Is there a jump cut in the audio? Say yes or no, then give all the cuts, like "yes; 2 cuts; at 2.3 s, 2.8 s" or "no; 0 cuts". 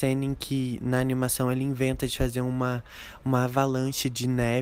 no; 0 cuts